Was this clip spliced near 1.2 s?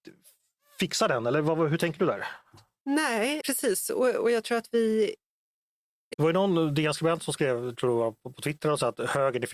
no; 2 cuts; at 3.4 s, 6.1 s

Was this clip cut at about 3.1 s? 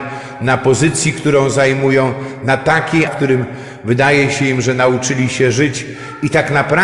yes; 1 cut; at 3.1 s

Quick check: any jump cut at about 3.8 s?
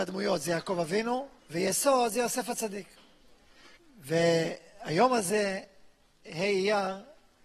yes; 2 cuts; at 1.4 s, 3.8 s

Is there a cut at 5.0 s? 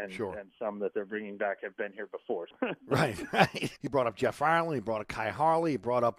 no; 2 cuts; at 2.5 s, 3.8 s

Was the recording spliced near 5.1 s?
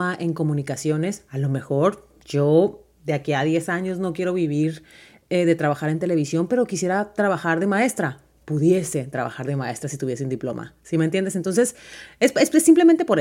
no; 0 cuts

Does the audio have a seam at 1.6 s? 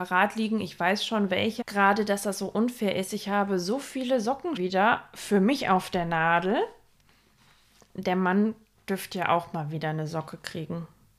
yes; 2 cuts; at 1.6 s, 4.6 s

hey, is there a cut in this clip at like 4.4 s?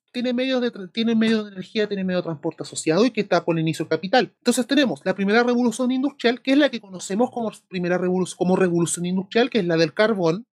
yes; 1 cut; at 4.4 s

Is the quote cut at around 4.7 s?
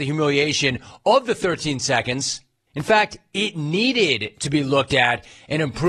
no; 1 cut; at 2.7 s

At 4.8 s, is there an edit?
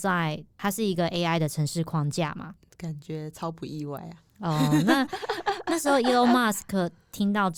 no; 1 cut; at 2.6 s

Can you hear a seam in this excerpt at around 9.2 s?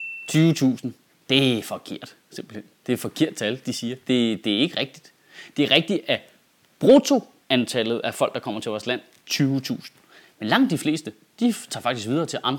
yes; 1 cut; at 9.2 s

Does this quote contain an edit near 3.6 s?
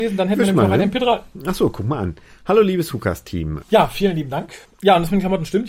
yes; 1 cut; at 3.6 s

